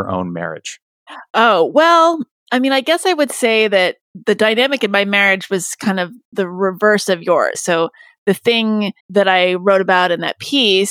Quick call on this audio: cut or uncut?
cut